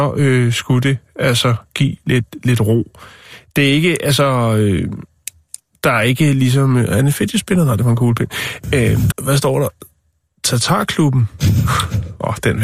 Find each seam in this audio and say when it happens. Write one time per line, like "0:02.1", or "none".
0:09.1